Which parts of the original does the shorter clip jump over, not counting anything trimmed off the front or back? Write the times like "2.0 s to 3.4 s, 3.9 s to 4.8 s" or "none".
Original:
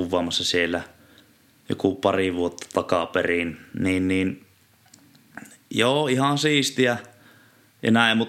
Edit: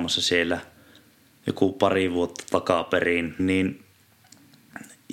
3.6 s to 4.0 s